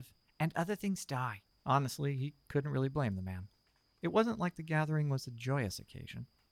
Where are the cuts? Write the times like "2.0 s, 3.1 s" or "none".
1.5 s

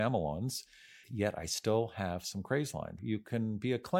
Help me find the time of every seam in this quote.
1.0 s, 3.0 s

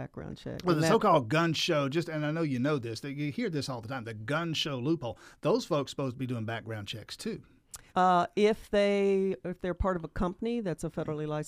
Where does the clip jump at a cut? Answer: 7.9 s

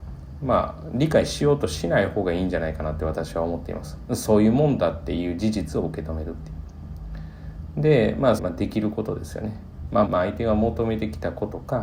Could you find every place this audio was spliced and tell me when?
8.4 s, 10.1 s

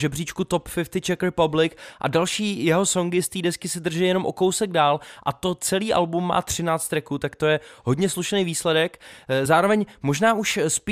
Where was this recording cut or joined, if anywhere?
none

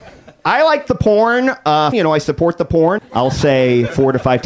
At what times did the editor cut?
1.9 s, 3.0 s

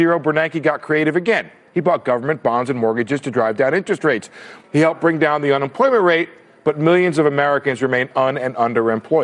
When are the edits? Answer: 4.6 s

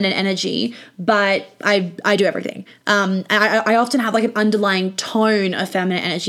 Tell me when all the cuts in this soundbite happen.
none

